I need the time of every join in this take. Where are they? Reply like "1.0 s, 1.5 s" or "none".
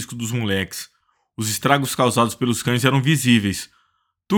none

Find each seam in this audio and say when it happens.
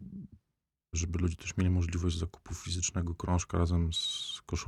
0.9 s

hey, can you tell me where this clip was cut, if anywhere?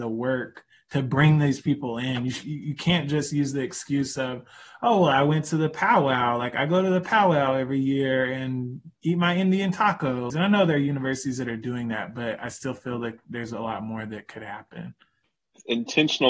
10.3 s

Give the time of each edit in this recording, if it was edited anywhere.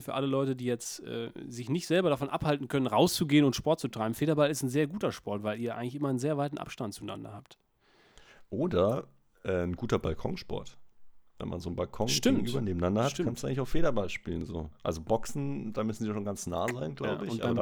none

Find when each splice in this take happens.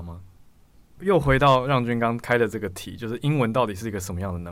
1.0 s

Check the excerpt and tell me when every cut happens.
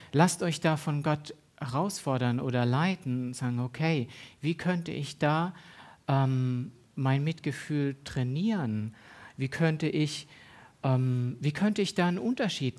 none

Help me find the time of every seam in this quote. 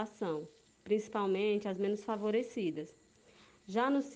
none

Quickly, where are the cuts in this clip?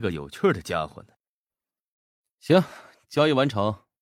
none

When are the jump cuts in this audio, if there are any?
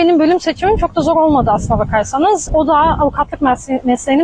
2.5 s

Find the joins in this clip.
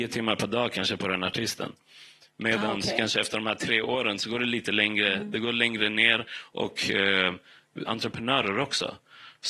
7.9 s

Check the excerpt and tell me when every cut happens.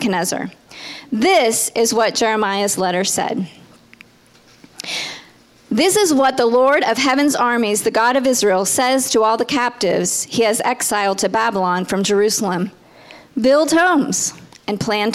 none

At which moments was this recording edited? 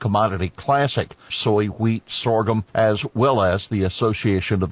1.3 s, 2.7 s

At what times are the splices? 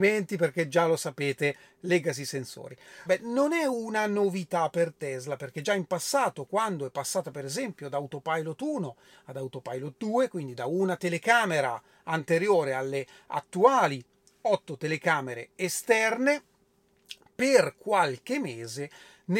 3.1 s

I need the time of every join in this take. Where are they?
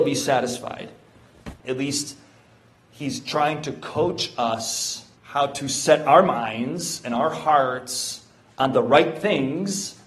1.6 s, 5.2 s

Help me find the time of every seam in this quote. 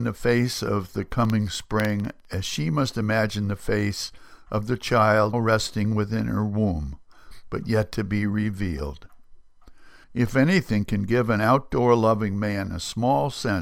5.3 s, 10.0 s

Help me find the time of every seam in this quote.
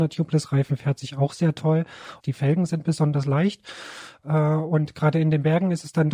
2.2 s

